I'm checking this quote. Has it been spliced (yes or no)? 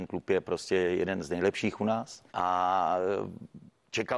yes